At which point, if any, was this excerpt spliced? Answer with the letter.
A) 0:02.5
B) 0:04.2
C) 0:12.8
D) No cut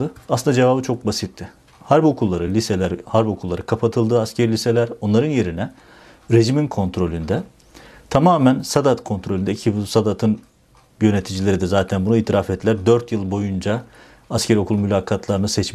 D